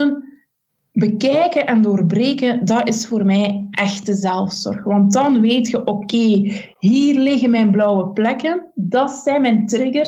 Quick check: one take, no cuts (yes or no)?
yes